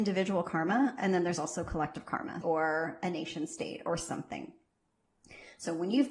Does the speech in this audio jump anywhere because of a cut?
yes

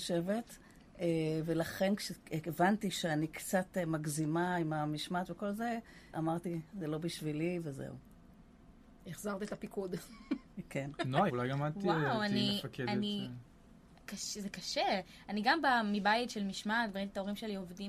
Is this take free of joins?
no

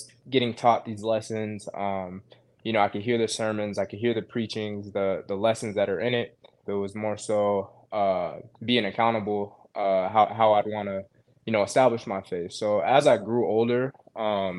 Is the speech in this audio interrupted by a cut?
yes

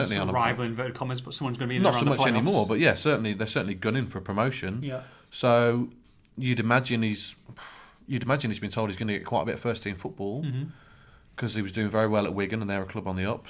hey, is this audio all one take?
yes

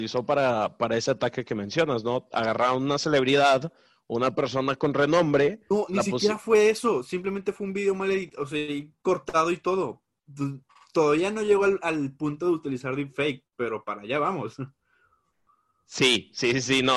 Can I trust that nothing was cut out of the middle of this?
yes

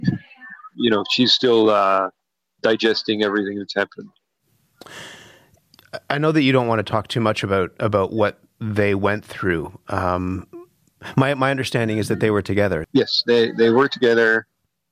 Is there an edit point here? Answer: yes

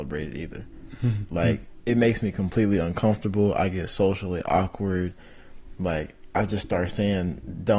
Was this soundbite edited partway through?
no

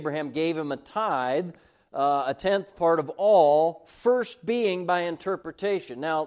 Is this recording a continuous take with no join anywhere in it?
yes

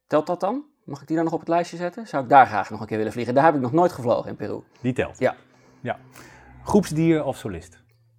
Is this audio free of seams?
yes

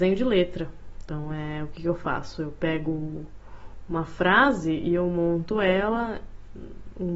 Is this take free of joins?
yes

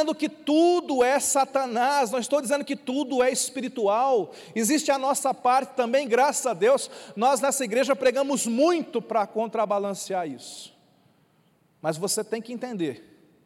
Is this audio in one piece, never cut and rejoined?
yes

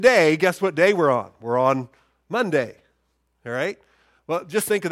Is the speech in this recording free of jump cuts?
yes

